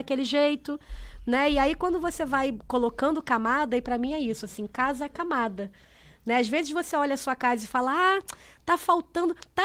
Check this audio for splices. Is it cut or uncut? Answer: uncut